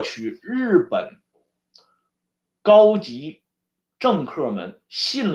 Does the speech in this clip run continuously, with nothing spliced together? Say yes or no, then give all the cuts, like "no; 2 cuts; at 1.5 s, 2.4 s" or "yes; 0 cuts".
yes; 0 cuts